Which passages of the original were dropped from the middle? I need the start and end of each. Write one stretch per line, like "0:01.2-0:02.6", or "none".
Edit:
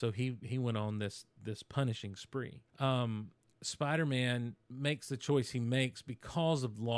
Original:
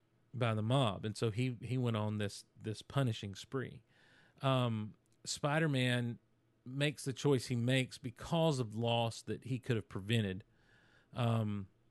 0:03.9-0:04.3
0:06.3-0:06.6